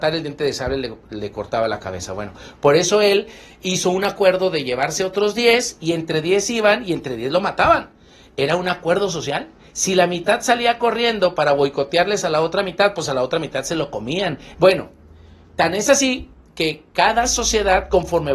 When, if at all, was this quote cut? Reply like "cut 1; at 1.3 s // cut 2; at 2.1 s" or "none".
cut 1; at 14.5 s